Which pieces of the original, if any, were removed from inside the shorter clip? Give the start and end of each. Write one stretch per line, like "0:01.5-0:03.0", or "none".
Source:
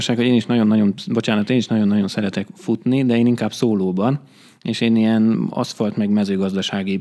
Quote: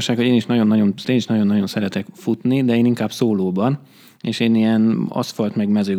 0:01.0-0:01.5